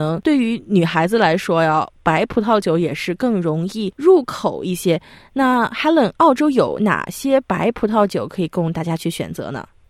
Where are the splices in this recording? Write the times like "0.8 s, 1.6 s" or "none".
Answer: none

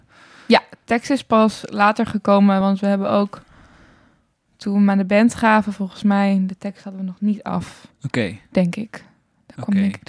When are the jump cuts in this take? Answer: none

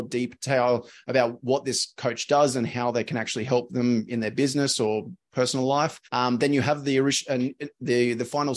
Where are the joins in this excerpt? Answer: 6.0 s

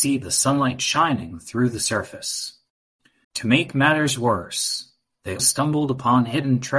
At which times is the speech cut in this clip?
3.2 s, 5.4 s

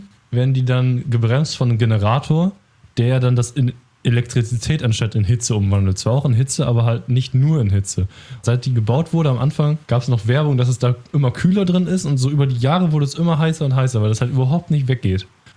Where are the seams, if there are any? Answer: 8.4 s, 9.8 s

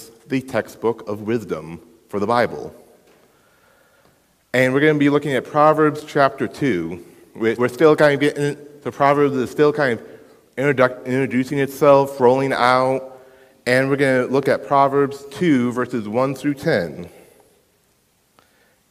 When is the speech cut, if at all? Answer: 7.6 s

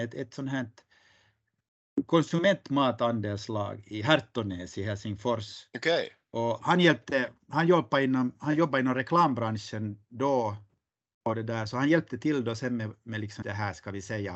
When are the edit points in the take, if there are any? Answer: 13.4 s

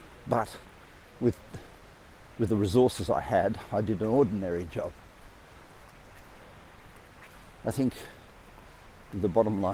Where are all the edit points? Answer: 2.3 s

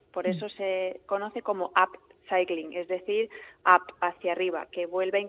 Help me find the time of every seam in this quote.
none

